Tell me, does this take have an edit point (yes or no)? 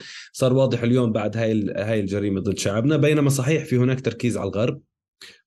yes